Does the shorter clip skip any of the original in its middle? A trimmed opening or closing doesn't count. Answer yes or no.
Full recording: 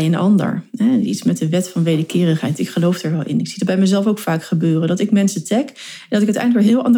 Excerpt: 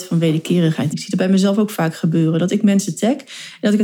yes